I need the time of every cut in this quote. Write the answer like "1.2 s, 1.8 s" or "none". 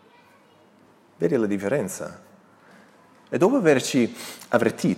none